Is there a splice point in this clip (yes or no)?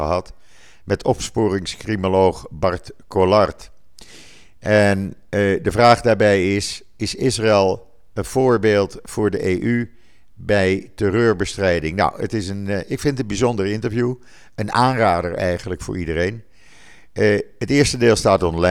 no